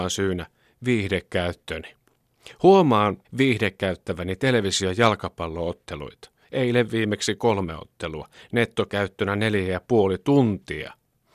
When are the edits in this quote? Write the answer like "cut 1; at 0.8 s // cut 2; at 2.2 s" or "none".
cut 1; at 3.2 s